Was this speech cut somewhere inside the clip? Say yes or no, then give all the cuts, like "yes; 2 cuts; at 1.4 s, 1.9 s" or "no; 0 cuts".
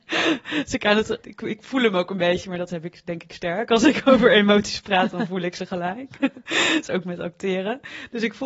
yes; 1 cut; at 1.2 s